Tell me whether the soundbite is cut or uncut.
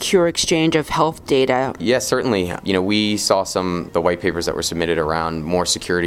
cut